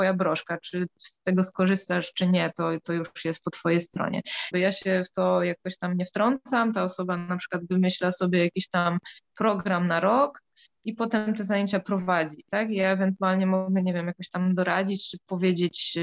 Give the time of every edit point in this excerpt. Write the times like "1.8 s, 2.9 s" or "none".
4.5 s